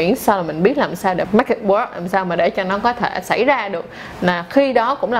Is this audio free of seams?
no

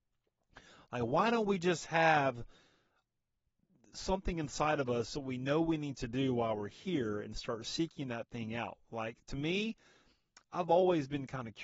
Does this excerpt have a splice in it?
no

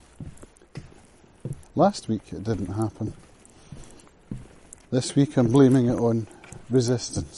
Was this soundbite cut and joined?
yes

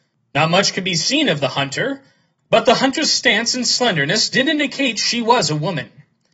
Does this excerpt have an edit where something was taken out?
yes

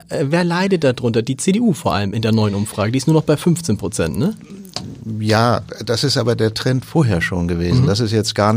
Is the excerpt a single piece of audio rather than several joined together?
yes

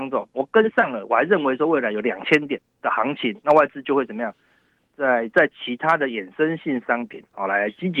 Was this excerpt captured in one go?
yes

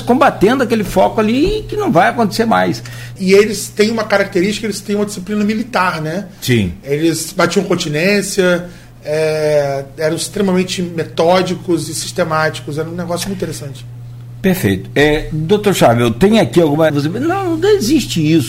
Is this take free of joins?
no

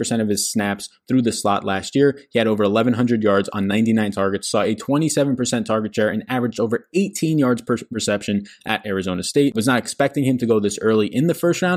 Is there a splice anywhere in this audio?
no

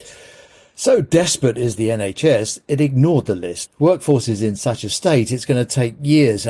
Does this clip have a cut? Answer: yes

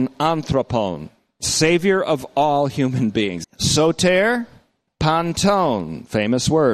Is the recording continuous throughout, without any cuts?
no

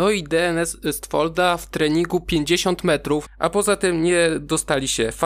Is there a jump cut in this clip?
yes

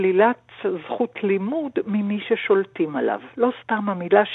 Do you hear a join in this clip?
no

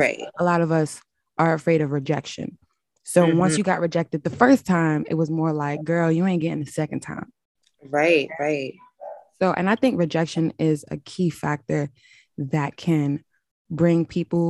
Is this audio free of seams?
yes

